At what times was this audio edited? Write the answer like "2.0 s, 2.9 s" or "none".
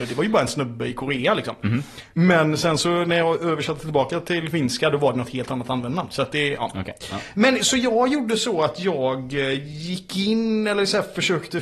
none

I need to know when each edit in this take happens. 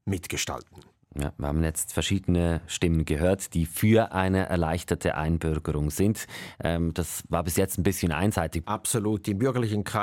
8.6 s

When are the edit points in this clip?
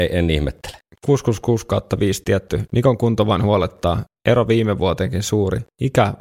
none

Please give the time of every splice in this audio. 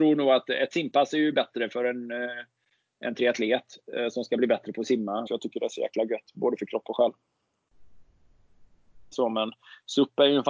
5.3 s, 9.1 s

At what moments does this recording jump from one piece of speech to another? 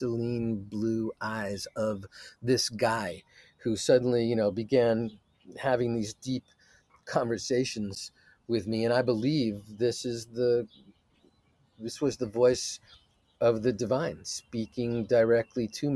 none

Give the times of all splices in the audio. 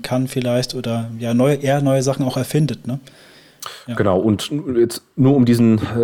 none

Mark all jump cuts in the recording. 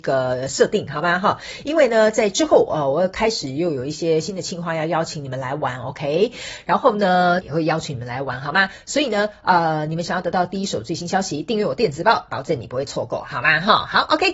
7.4 s, 12.3 s

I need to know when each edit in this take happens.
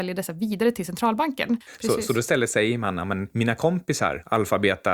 1.7 s

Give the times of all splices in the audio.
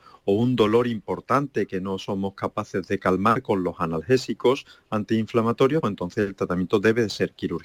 5.8 s

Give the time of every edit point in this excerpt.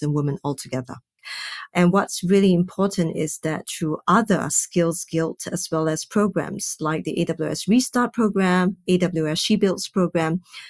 none

